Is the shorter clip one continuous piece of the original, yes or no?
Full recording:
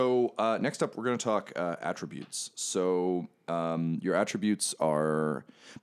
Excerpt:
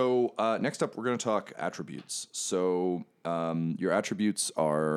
no